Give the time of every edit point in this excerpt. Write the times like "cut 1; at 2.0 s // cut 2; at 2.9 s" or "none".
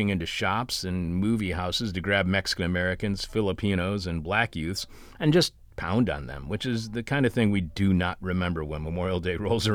none